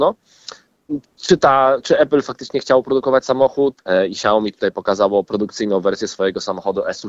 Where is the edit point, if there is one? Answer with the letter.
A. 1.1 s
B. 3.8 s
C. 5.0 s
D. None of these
B